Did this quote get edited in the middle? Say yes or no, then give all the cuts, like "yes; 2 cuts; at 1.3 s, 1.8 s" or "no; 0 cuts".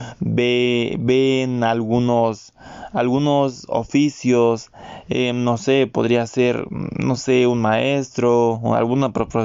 no; 0 cuts